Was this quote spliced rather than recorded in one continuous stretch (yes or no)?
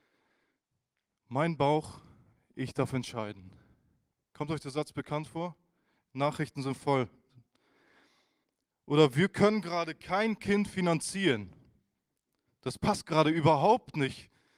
no